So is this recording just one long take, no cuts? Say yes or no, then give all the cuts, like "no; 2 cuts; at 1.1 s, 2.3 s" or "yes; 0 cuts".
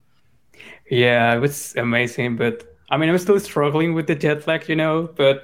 yes; 0 cuts